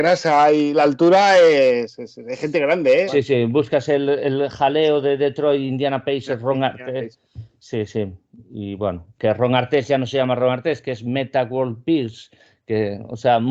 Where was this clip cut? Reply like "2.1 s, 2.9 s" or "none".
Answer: 3.1 s